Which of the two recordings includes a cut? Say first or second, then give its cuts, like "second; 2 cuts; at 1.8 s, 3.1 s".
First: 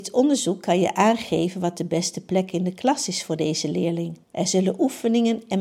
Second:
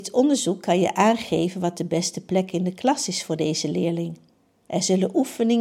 first; 1 cut; at 4.2 s